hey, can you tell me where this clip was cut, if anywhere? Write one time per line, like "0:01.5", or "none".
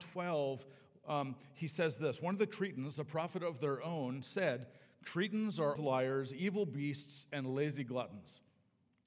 0:05.8